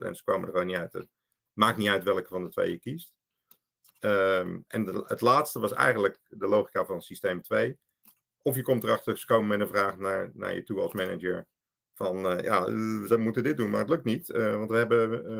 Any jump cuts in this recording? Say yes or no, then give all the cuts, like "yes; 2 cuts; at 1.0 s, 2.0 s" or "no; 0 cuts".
no; 0 cuts